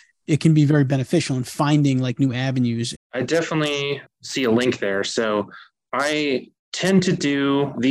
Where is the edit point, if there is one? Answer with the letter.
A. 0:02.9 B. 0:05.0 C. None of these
A